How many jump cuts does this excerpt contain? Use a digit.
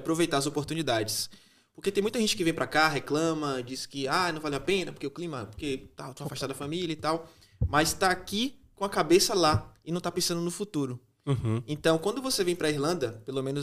0